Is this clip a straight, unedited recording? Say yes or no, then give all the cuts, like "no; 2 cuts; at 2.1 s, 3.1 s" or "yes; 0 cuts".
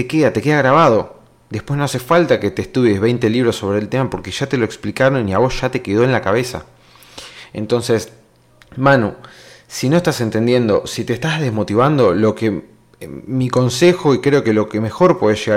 yes; 0 cuts